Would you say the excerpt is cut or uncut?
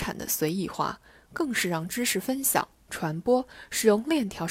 uncut